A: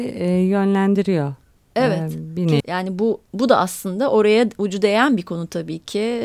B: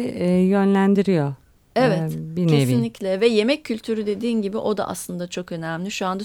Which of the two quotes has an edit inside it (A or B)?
A